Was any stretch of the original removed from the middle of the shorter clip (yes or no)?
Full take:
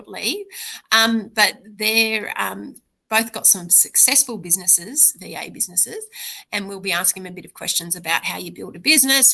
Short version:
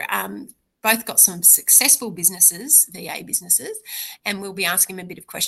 no